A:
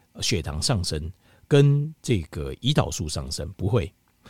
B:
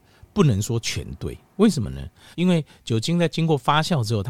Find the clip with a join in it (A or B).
B